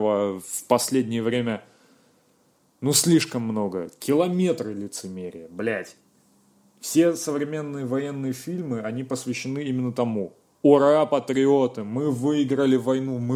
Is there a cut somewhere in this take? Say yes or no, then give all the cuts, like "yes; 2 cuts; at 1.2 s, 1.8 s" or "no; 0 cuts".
no; 0 cuts